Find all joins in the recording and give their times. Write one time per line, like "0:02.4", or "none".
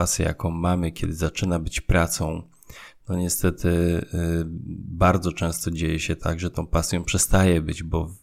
none